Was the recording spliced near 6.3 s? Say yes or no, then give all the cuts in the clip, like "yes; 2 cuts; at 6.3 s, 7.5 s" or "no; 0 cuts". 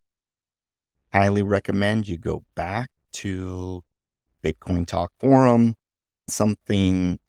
yes; 1 cut; at 6.3 s